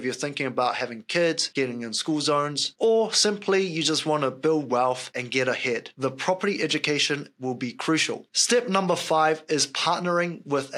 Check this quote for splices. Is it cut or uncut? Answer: uncut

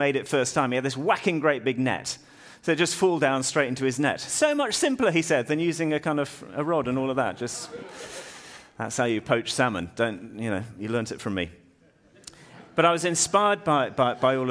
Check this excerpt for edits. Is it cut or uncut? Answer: uncut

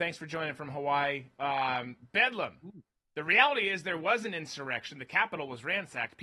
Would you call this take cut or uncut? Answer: uncut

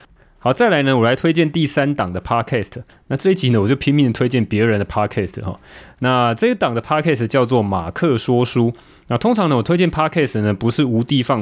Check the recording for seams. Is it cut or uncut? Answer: uncut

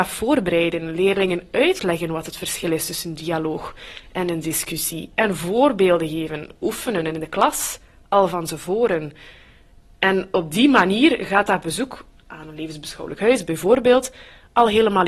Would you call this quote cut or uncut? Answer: uncut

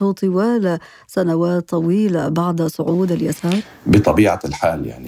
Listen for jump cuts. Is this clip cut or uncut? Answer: uncut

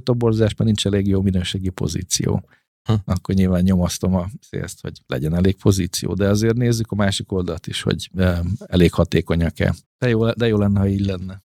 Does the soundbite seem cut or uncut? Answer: cut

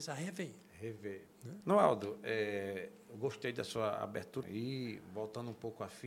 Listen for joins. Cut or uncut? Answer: cut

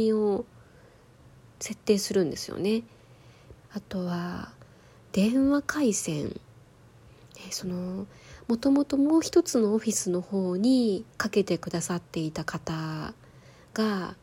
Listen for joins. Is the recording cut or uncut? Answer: cut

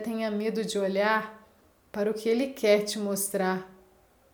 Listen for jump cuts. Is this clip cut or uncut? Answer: uncut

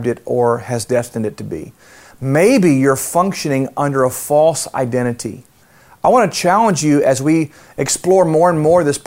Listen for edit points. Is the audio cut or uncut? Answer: uncut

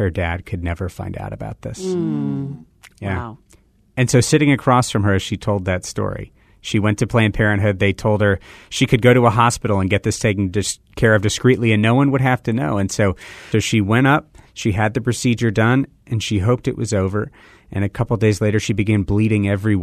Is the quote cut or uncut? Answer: cut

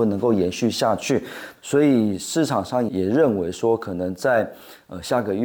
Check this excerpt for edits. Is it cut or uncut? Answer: cut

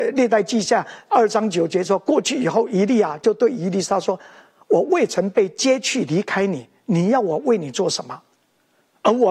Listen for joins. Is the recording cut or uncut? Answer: cut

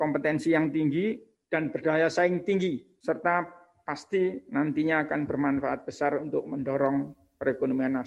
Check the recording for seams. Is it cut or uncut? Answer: uncut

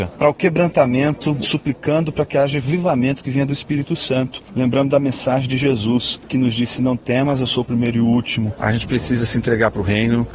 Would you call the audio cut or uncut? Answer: cut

